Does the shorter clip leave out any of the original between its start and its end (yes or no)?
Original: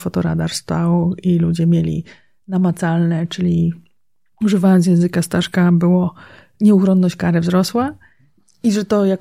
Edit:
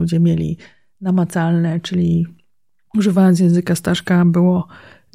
no